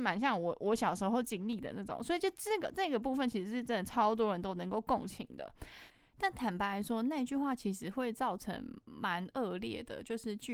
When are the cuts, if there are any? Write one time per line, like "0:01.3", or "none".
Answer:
none